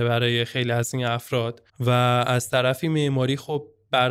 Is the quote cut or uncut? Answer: cut